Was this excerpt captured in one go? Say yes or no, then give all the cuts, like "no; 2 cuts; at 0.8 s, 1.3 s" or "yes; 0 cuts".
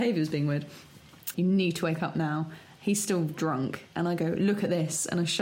no; 1 cut; at 1.3 s